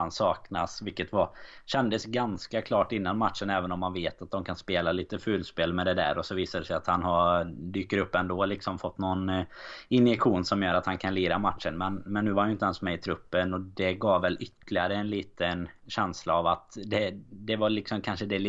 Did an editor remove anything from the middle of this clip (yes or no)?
no